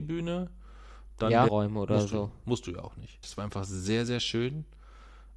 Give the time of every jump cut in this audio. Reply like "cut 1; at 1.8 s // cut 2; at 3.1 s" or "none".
cut 1; at 1.5 s // cut 2; at 3.2 s